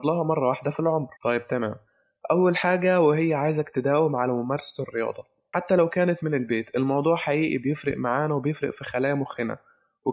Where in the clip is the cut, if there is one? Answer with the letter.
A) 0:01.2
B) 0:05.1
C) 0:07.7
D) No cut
A